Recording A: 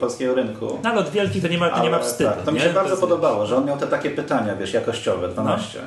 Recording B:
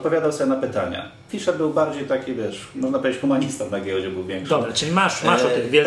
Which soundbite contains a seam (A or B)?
B